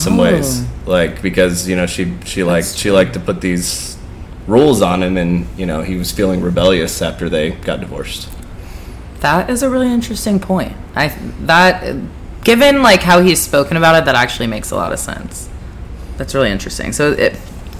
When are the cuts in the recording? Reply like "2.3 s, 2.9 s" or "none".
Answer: none